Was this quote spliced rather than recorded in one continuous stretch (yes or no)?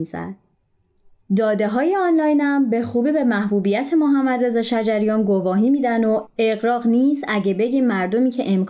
no